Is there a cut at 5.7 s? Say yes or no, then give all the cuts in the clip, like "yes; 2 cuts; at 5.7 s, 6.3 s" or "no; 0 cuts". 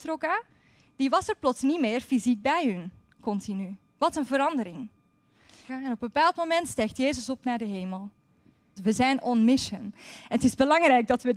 yes; 2 cuts; at 5.7 s, 8.8 s